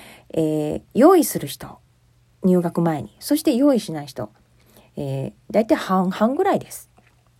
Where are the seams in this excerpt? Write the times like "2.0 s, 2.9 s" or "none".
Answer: none